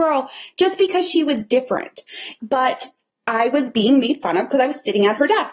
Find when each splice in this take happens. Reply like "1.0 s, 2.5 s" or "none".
2.4 s